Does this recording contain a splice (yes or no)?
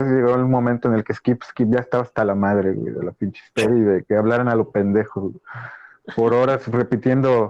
no